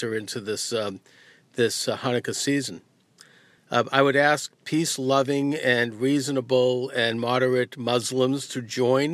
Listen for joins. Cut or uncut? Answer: uncut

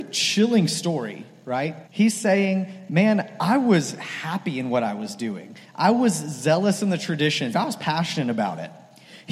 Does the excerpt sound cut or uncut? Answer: cut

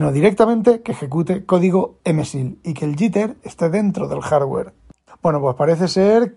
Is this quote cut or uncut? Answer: cut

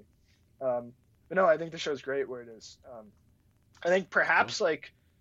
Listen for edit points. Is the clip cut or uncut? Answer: uncut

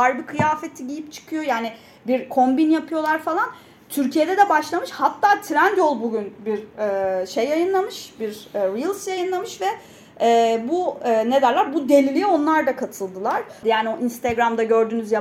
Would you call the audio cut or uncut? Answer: cut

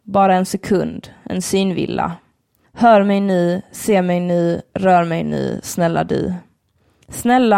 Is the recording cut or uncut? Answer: cut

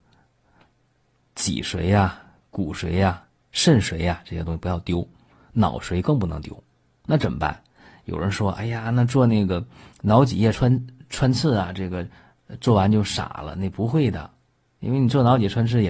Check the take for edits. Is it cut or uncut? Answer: uncut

